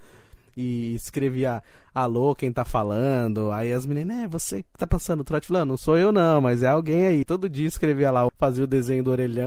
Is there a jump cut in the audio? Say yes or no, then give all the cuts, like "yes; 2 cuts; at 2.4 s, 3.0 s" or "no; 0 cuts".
yes; 2 cuts; at 7.2 s, 8.3 s